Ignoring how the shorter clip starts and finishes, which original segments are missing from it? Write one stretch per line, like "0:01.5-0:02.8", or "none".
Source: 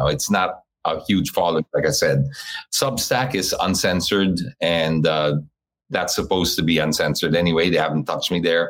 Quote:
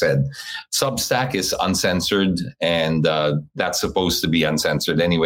0:05.5-0:05.8